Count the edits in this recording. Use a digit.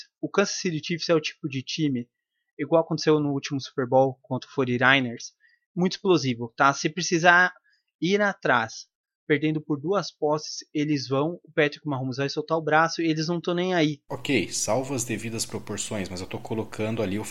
1